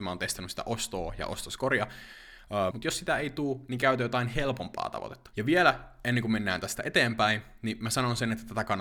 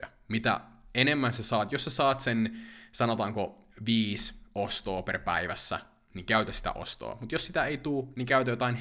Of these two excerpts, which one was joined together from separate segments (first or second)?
first